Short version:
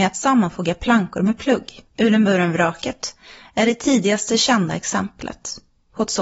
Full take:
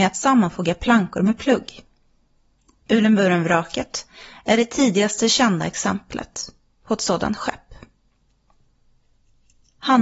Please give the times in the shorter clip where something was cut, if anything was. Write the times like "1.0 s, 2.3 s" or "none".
1.9 s